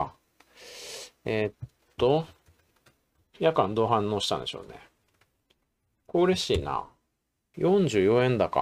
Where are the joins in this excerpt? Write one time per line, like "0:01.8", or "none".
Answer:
0:07.5